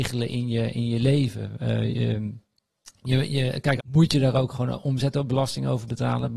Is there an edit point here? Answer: yes; 1 cut; at 3.8 s

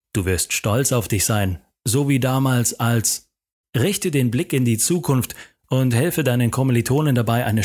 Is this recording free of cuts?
yes; 0 cuts

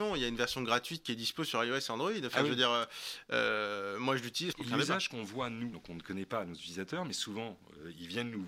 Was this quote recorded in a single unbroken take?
no; 2 cuts; at 4.5 s, 5.7 s

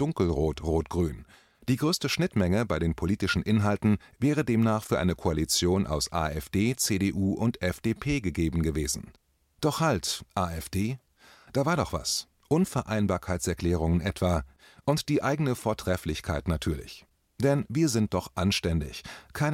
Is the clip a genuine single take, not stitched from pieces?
yes; 0 cuts

